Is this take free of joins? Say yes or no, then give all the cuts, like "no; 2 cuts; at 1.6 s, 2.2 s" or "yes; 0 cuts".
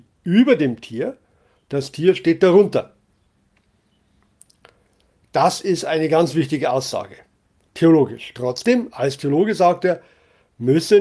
yes; 0 cuts